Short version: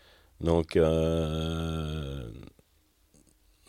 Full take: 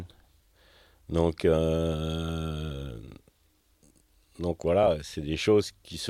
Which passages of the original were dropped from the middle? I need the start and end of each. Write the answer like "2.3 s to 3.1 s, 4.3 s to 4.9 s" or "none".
none